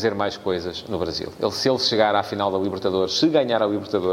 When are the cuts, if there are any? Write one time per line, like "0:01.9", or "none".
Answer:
none